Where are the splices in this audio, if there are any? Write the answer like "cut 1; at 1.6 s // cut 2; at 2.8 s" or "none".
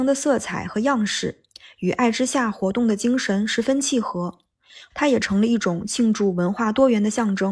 cut 1; at 4.9 s